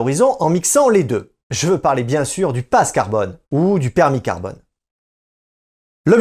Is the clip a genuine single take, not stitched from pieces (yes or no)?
no